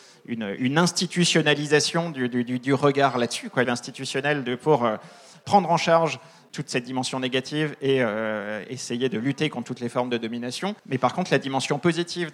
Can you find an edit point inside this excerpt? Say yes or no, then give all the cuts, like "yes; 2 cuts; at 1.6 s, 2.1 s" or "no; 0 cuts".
yes; 2 cuts; at 3.6 s, 10.8 s